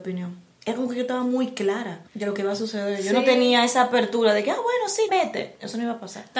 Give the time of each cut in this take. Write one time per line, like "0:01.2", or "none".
0:05.1